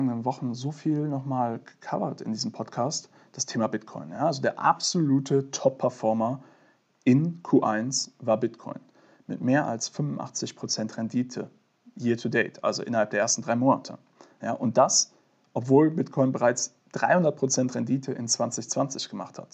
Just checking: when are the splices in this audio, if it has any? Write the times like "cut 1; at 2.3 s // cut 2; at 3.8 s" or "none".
none